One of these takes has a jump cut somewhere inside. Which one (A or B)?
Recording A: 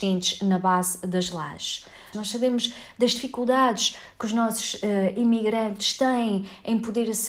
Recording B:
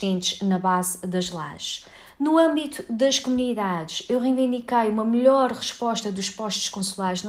A